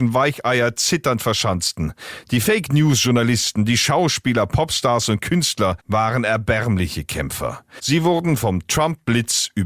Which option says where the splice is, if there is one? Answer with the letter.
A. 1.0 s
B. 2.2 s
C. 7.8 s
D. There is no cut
D